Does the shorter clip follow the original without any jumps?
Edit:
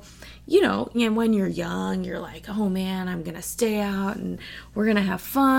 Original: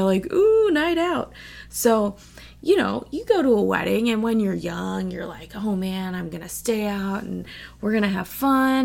no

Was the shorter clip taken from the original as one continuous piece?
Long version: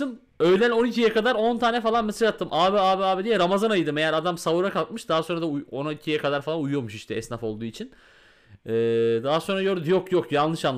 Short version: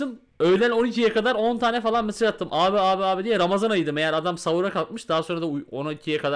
yes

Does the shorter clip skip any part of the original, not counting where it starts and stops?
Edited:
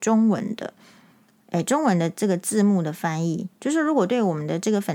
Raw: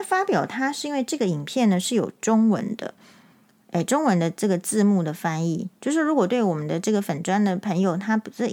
no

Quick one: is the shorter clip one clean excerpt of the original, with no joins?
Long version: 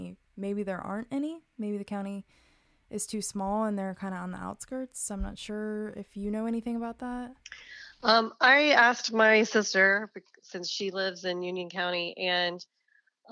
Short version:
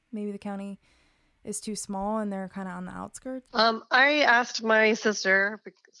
no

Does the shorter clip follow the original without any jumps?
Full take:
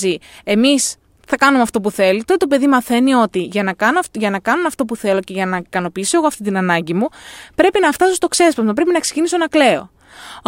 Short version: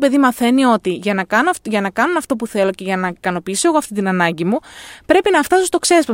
yes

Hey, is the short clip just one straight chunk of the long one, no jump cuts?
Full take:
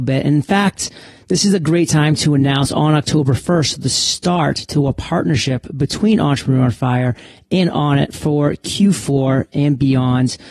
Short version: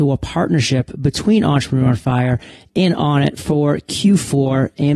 yes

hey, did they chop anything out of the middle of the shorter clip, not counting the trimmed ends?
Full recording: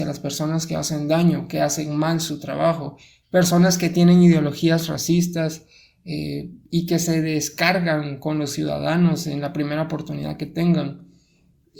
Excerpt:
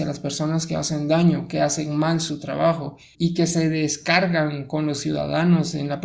yes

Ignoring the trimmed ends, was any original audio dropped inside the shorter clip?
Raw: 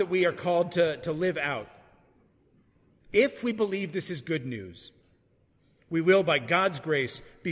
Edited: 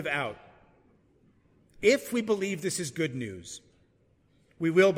no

